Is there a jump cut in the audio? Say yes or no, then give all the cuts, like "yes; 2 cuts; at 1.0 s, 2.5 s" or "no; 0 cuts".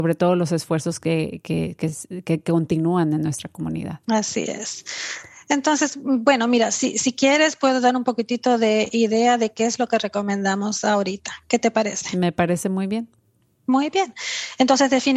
yes; 1 cut; at 4.0 s